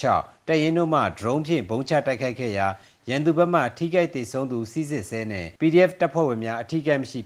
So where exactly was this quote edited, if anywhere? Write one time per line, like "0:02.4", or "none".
0:05.6